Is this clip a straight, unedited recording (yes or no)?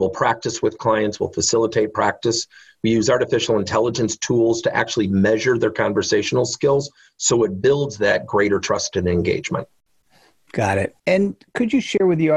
no